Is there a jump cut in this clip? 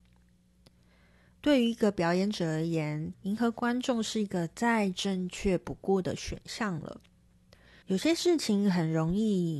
yes; 2 cuts; at 3.1 s, 7.8 s

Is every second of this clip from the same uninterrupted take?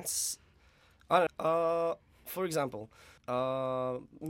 no; 2 cuts; at 1.3 s, 3.2 s

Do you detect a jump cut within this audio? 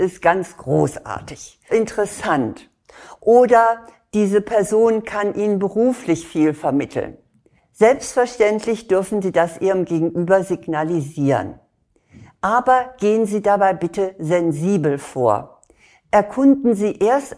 yes; 2 cuts; at 1.7 s, 7.6 s

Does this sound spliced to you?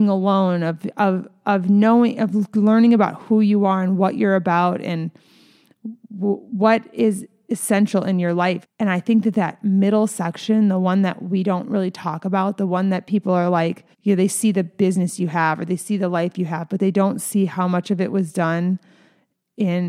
yes; 2 cuts; at 8.6 s, 13.9 s

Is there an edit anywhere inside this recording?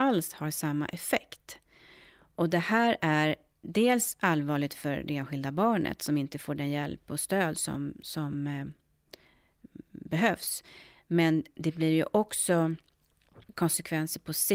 no; 0 cuts

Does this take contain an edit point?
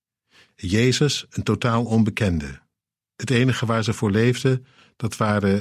no; 0 cuts

